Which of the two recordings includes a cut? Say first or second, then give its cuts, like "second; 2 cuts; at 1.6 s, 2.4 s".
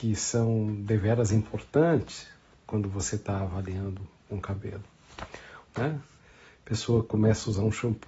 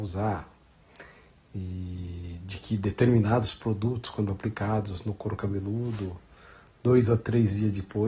first; 1 cut; at 5.6 s